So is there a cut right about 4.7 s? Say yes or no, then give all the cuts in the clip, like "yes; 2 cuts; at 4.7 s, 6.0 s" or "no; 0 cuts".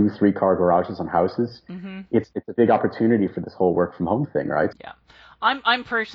yes; 1 cut; at 4.7 s